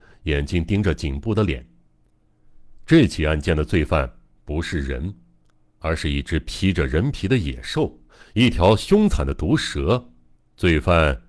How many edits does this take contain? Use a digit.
1